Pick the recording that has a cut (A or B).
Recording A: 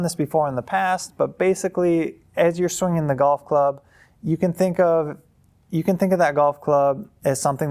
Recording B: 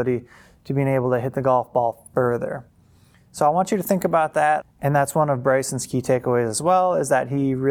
B